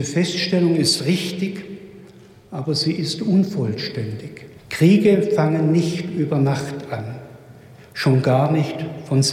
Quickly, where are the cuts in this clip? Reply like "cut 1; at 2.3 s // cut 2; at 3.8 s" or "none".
cut 1; at 4.6 s